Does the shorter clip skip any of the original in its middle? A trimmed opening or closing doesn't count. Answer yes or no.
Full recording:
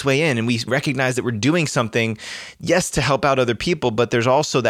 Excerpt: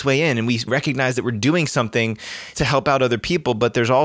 yes